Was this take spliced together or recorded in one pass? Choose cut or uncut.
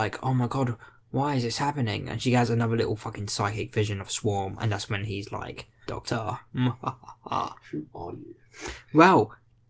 cut